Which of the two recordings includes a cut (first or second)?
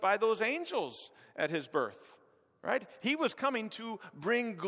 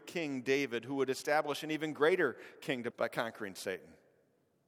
second